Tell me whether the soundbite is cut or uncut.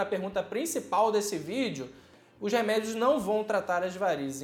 uncut